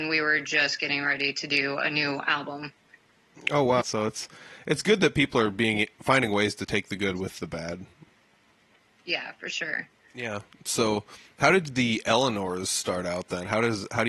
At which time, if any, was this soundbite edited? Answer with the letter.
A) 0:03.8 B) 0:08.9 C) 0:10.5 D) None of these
A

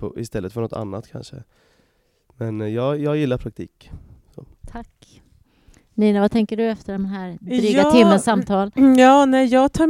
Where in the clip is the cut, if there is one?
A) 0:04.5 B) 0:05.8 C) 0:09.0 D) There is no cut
A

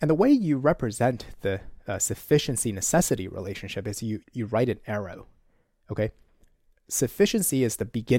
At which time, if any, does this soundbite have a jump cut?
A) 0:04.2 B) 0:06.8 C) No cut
A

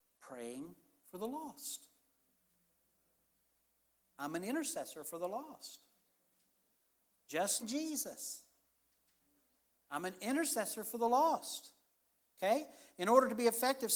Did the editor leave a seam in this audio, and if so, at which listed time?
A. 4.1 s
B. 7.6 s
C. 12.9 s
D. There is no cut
B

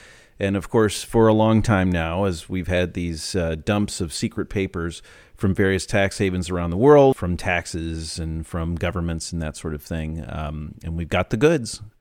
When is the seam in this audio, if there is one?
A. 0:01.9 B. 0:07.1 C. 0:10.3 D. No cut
B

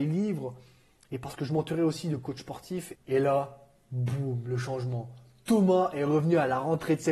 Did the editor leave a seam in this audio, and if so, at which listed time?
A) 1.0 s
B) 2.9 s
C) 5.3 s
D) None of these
B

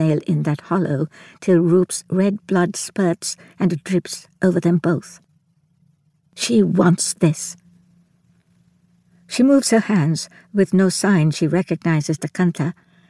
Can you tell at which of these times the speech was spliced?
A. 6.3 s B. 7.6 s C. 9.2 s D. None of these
D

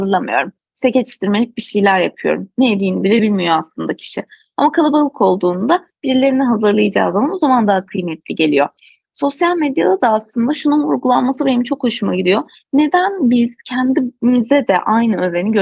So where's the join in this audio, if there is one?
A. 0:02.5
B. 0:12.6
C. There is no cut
C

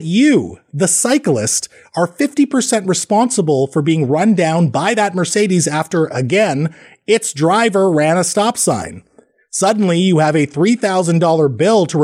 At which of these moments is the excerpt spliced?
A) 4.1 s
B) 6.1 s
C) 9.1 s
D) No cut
D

